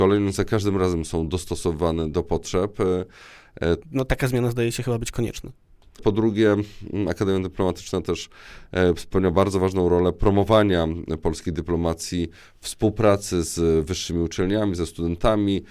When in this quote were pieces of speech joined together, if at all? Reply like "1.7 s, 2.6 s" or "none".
2.1 s, 3.8 s, 6.0 s